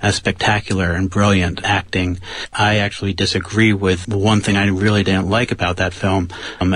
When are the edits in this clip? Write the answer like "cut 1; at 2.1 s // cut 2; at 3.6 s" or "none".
cut 1; at 2.5 s // cut 2; at 4.0 s